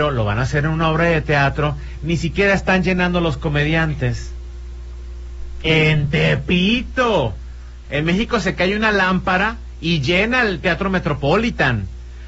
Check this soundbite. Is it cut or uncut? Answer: cut